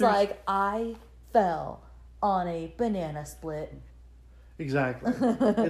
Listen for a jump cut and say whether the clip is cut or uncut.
uncut